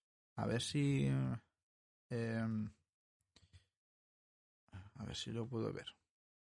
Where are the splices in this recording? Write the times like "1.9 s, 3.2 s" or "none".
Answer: none